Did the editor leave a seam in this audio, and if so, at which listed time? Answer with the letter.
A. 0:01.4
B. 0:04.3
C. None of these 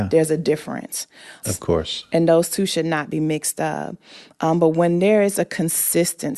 A